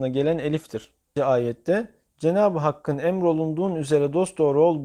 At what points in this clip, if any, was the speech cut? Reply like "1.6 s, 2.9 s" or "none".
1.2 s